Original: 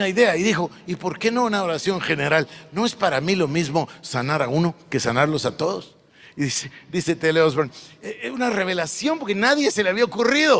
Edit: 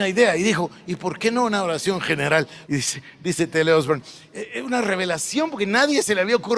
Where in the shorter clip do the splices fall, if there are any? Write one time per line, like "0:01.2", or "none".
0:02.6